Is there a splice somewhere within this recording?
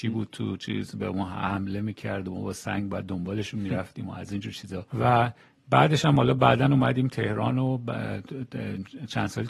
yes; 1 cut; at 4.9 s

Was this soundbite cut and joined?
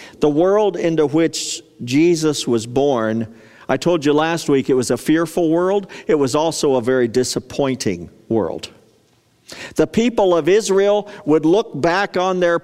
no; 0 cuts

